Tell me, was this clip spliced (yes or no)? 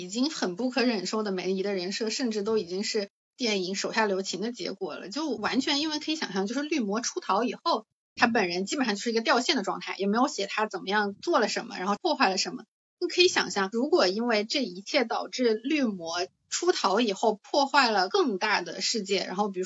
no